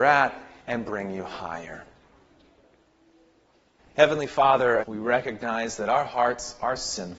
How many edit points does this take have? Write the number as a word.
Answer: two